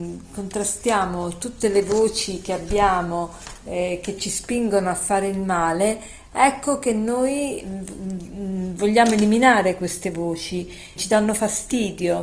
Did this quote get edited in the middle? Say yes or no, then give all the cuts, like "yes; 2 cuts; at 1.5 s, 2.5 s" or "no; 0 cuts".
yes; 1 cut; at 11.0 s